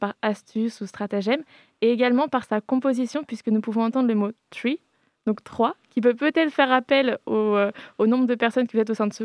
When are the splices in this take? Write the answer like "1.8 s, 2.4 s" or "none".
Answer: none